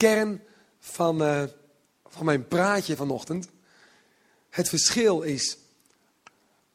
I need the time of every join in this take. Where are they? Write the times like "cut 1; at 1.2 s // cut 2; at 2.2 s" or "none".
none